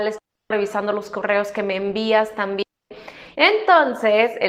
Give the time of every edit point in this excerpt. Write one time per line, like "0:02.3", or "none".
0:03.3